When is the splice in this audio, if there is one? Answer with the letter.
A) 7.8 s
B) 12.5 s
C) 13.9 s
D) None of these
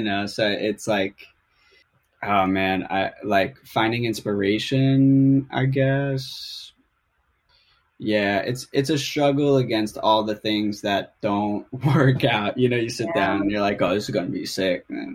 D